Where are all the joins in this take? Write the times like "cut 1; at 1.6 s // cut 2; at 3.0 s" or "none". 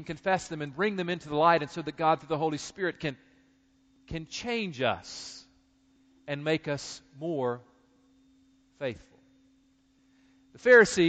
none